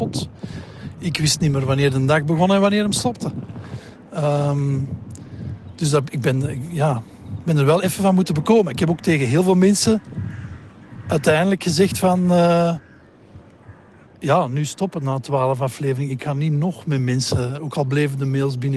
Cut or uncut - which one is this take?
uncut